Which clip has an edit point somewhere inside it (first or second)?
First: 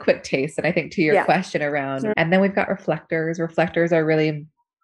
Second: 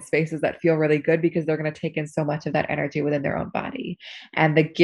first